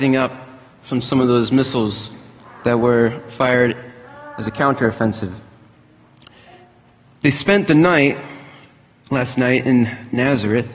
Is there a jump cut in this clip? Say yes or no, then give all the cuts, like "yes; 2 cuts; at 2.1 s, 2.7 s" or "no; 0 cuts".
no; 0 cuts